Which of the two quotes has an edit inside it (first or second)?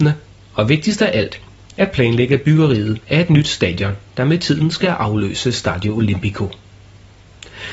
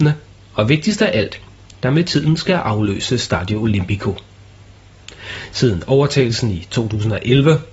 second